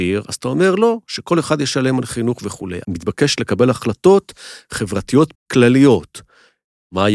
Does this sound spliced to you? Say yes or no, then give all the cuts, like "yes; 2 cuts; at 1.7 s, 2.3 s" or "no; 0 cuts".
yes; 2 cuts; at 2.8 s, 5.3 s